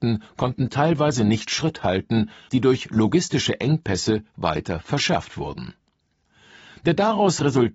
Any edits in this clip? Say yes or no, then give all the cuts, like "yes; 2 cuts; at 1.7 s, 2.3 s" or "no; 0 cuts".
yes; 1 cut; at 2.5 s